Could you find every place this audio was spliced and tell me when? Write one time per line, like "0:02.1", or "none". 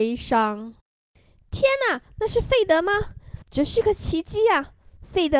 0:03.4